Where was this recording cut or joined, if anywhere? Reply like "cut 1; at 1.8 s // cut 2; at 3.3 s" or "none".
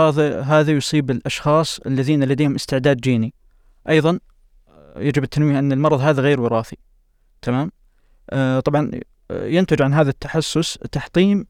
none